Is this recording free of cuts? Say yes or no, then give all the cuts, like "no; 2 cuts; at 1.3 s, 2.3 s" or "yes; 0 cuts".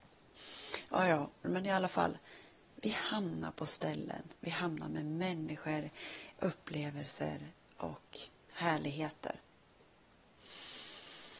no; 2 cuts; at 1.4 s, 4.4 s